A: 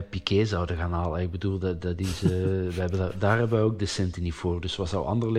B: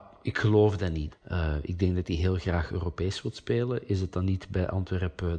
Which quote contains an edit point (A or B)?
B